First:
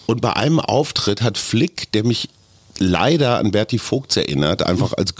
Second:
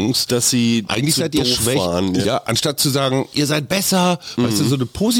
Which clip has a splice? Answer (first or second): second